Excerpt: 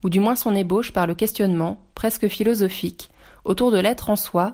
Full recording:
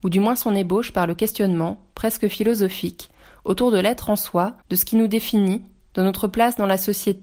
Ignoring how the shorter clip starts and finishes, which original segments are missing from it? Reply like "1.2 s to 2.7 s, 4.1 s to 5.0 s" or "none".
none